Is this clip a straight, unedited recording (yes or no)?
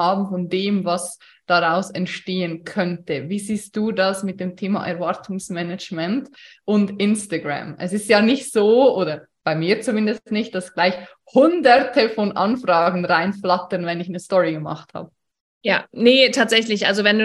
yes